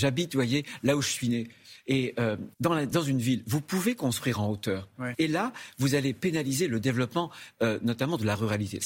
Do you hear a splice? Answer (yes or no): yes